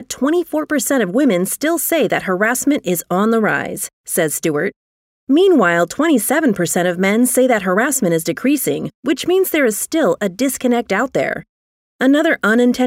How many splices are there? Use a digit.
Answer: 0